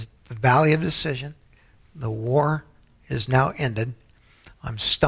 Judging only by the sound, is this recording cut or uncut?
uncut